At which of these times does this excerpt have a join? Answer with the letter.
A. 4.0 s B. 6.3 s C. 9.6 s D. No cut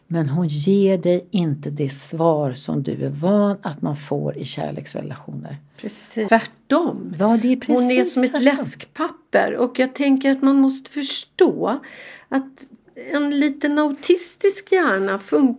B